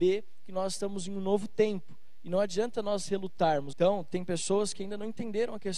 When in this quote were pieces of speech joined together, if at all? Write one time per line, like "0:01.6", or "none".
0:03.7